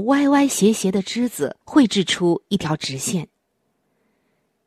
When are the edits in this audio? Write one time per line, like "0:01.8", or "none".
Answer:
0:01.6